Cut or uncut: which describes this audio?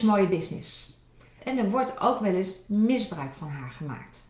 cut